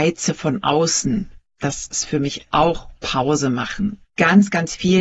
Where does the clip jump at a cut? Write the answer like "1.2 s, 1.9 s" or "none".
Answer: 4.1 s